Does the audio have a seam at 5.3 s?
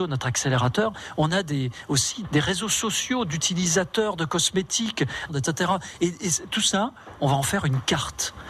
yes; 1 cut; at 5.3 s

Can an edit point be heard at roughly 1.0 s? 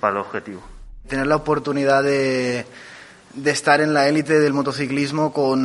yes; 1 cut; at 1.0 s

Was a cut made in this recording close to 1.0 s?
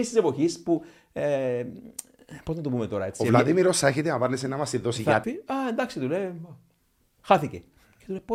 no; 1 cut; at 5.2 s

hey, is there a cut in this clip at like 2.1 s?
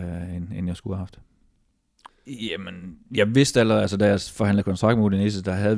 yes; 1 cut; at 2.1 s

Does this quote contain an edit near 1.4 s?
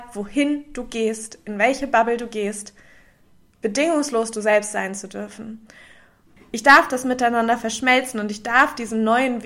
no; 1 cut; at 6.4 s

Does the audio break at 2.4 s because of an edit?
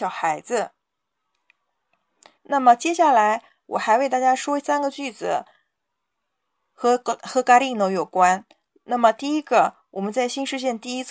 yes; 1 cut; at 2.4 s

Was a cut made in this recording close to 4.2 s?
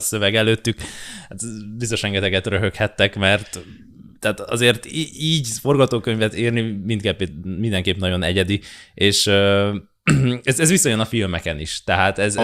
yes; 1 cut; at 4.2 s

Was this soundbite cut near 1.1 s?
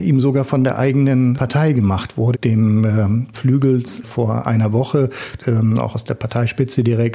no; 3 cuts; at 2.3 s, 3.3 s, 5.4 s

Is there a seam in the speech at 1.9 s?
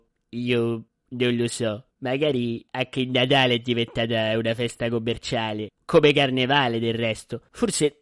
yes; 1 cut; at 1.9 s

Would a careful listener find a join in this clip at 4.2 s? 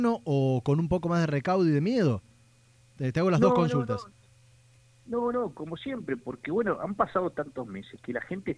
no; 0 cuts

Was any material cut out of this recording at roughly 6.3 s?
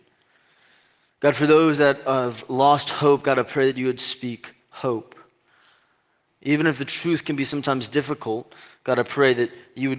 yes; 1 cut; at 6.3 s

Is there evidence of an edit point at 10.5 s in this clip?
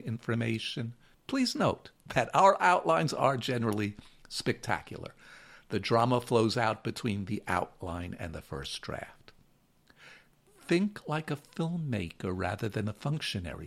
no; 1 cut; at 1.1 s

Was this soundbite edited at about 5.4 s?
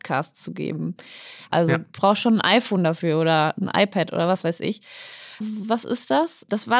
yes; 2 cuts; at 1.5 s, 5.4 s

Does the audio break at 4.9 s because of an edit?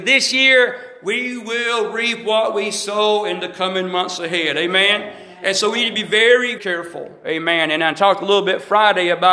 no; 1 cut; at 6.6 s

